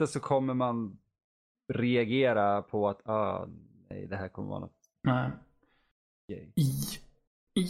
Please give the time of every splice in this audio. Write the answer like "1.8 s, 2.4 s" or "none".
none